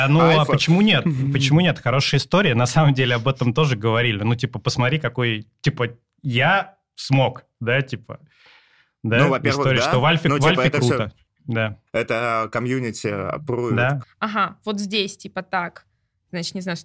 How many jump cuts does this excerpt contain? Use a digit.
2